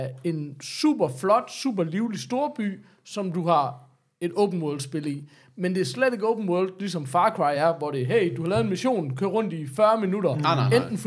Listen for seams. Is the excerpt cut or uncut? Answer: uncut